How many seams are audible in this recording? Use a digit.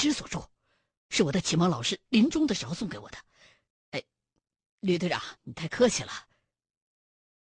2